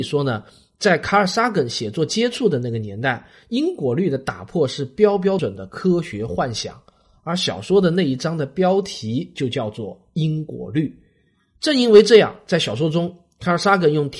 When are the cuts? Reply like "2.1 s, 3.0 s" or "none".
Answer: 5.4 s